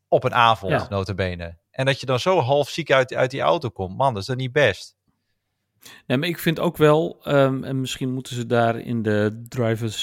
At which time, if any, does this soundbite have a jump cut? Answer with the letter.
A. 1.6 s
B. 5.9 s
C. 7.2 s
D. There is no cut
A